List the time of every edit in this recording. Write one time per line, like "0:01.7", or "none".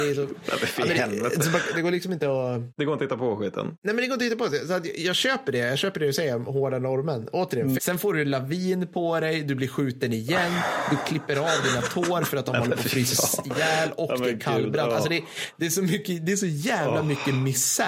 0:07.8

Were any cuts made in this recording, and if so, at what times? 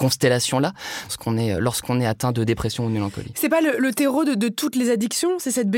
0:01.1

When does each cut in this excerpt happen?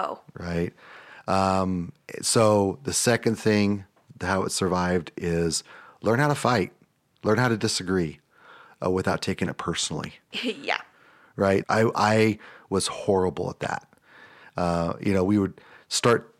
0:10.3
0:11.6

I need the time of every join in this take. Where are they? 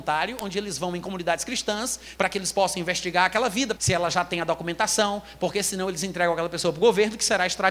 0:02.2
0:03.8

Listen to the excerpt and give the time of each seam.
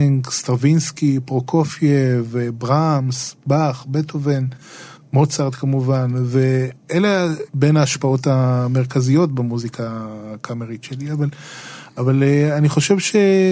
none

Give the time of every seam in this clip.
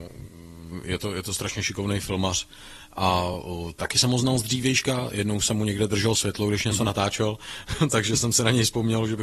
none

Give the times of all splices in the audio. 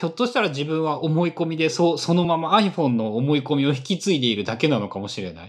none

